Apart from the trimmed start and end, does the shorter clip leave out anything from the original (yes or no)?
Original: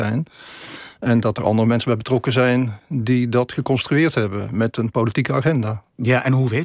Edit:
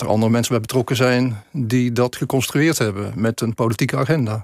no